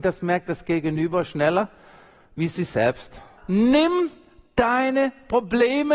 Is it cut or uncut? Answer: cut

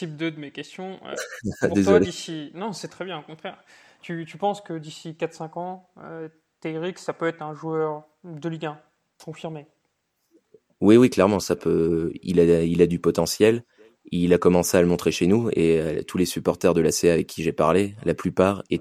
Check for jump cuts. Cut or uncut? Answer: uncut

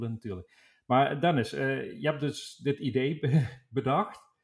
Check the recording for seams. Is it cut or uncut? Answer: uncut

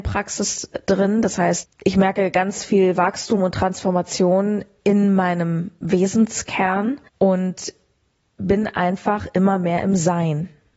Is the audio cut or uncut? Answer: cut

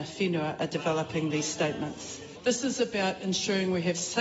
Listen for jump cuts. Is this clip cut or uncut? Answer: cut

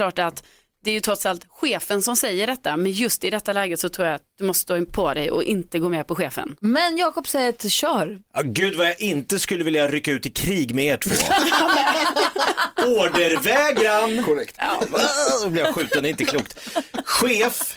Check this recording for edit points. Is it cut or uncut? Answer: cut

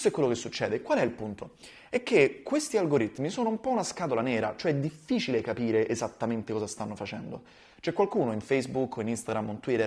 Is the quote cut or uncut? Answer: uncut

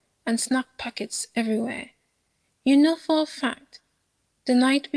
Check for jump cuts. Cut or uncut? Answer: uncut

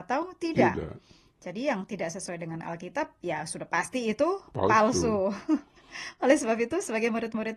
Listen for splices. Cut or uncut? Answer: uncut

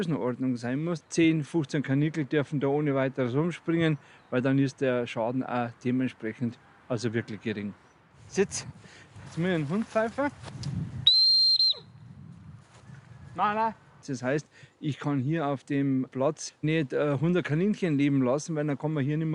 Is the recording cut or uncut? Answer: cut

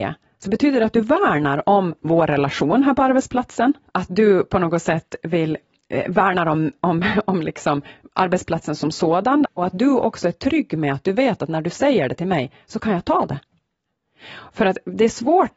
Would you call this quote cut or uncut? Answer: uncut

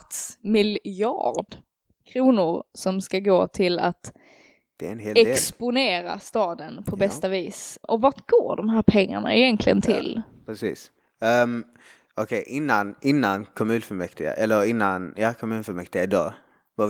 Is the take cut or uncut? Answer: uncut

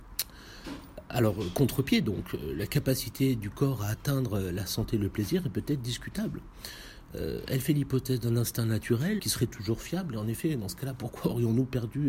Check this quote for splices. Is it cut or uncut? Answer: cut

